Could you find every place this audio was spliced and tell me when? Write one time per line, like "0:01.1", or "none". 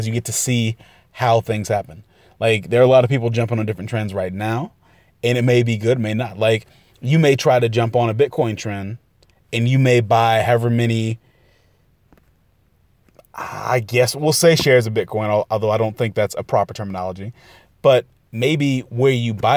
none